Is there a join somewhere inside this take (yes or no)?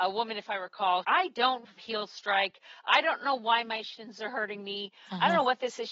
yes